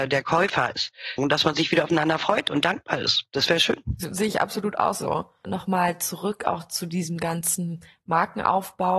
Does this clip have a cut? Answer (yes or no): yes